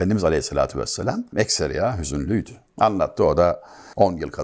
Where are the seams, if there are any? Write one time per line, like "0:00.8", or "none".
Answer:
0:01.3
0:02.7